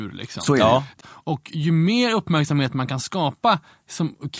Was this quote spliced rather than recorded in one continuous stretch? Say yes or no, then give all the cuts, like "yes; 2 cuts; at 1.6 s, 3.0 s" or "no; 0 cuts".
yes; 1 cut; at 1.0 s